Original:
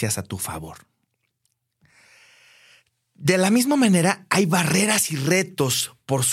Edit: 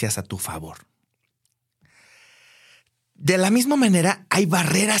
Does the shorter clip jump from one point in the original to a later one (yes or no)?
no